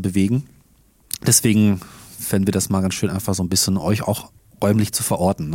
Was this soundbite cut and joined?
no; 0 cuts

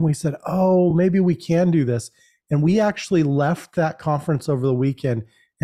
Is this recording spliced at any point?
no; 0 cuts

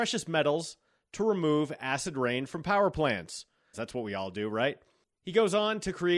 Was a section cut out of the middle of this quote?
yes; 1 cut; at 3.7 s

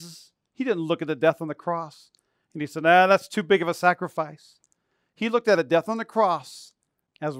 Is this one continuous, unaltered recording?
yes; 0 cuts

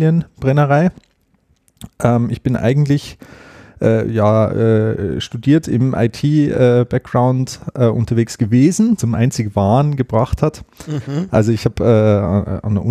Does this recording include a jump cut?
yes; 1 cut; at 9.0 s

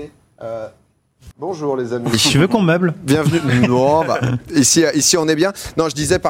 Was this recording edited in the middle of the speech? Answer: yes; 1 cut; at 1.3 s

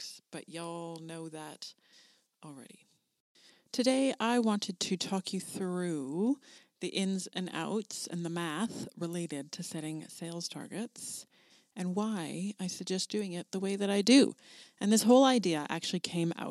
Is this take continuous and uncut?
yes; 0 cuts

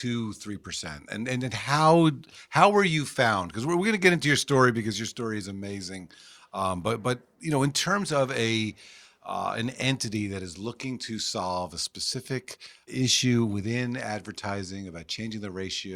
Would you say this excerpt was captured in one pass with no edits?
no; 2 cuts; at 7.0 s, 12.9 s

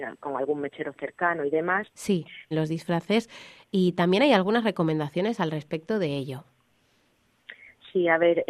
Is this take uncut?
no; 1 cut; at 2.5 s

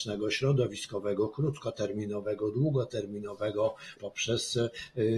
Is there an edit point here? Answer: yes; 1 cut; at 4.0 s

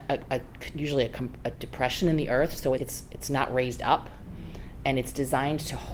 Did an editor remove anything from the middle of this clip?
yes; 1 cut; at 2.8 s

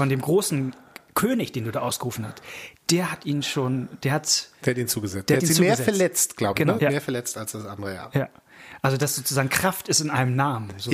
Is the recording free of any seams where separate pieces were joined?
no; 1 cut; at 6.8 s

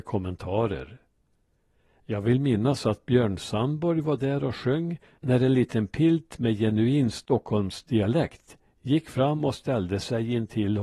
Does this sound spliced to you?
no; 0 cuts

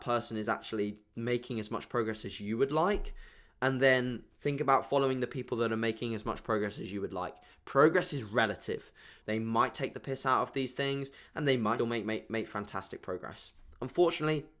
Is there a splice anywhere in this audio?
yes; 2 cuts; at 9.2 s, 11.8 s

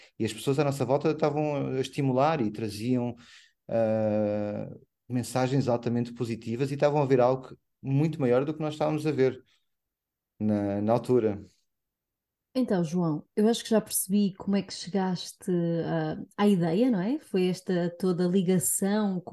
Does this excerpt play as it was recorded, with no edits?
yes; 0 cuts

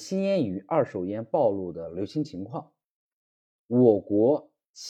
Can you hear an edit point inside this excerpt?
yes; 1 cut; at 3.6 s

